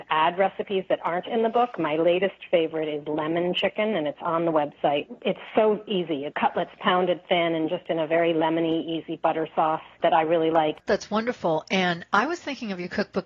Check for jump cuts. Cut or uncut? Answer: uncut